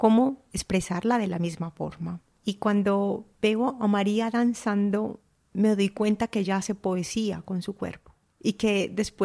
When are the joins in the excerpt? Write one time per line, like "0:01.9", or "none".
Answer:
none

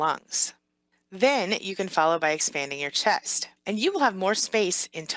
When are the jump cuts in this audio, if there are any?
0:03.6

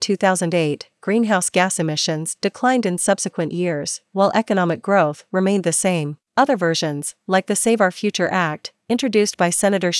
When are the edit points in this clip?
0:06.3

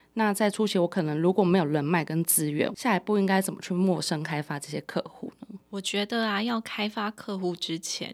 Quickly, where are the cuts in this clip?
0:05.6

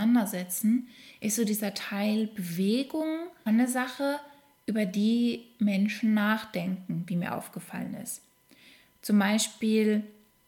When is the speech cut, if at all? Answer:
0:03.5

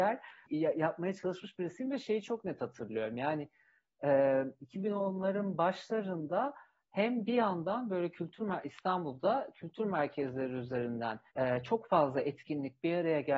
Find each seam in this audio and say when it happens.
0:11.3

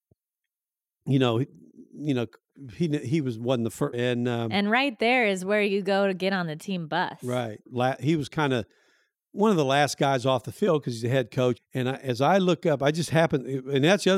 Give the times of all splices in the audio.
0:03.9
0:07.7
0:11.6

